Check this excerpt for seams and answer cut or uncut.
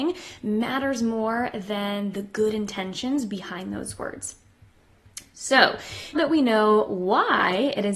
cut